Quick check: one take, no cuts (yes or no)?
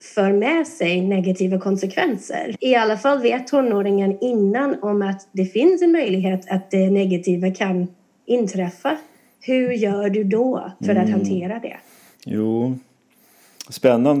no